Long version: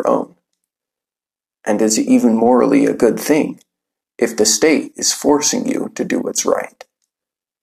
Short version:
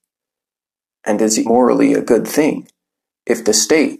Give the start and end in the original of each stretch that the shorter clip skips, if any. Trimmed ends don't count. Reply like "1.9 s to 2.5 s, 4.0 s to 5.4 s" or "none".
2.1 s to 2.4 s